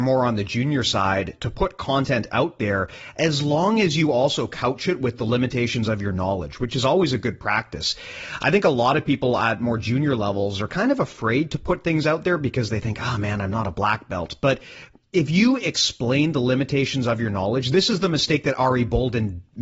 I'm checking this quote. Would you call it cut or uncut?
uncut